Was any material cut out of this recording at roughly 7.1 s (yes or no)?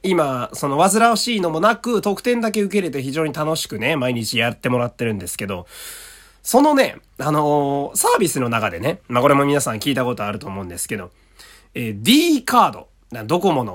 no